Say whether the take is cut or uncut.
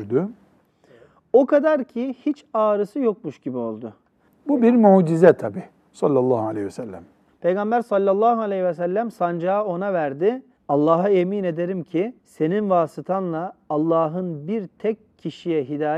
cut